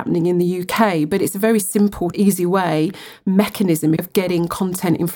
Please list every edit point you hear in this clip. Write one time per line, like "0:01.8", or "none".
0:02.1
0:04.0

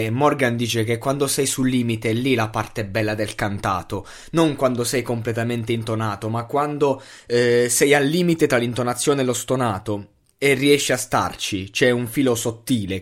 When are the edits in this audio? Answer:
none

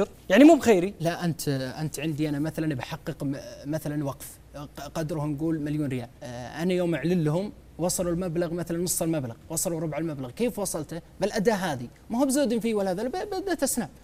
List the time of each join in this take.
0:01.0
0:06.2

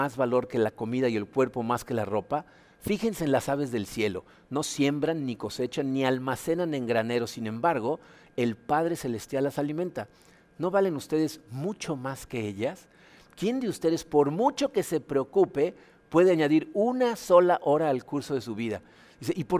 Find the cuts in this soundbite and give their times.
none

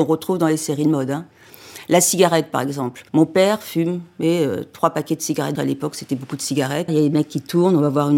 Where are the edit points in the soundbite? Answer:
0:03.1
0:05.5
0:06.9

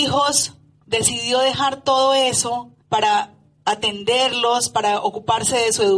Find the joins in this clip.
0:02.8

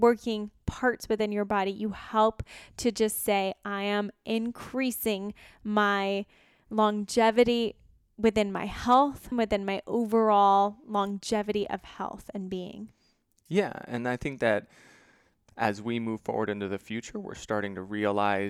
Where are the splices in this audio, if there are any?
0:09.3

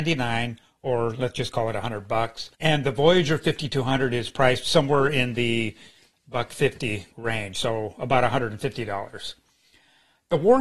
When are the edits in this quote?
0:02.5
0:07.1

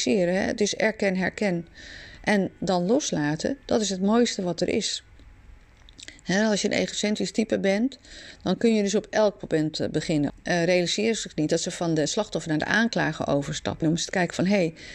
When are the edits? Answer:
0:10.3
0:13.8

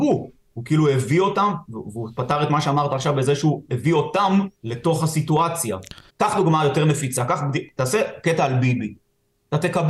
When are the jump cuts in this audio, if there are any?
0:04.6
0:06.1

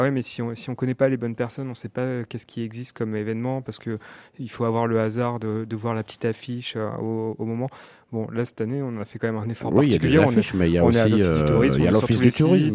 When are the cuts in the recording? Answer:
none

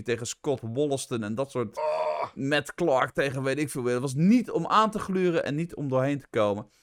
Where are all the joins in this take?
none

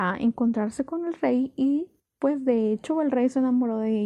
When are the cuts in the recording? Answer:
none

